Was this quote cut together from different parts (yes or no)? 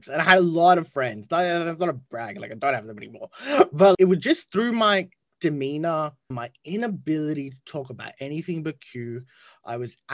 yes